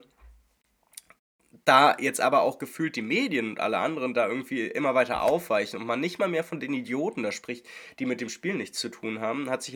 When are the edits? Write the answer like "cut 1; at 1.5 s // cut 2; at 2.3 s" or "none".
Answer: none